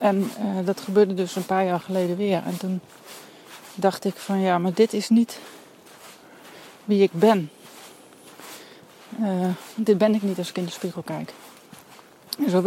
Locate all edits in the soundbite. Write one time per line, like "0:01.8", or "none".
none